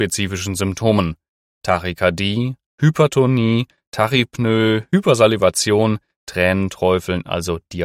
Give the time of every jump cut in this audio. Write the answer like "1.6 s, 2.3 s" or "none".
1.6 s